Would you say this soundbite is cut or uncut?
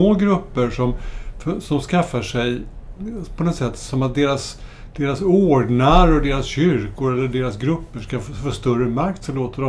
uncut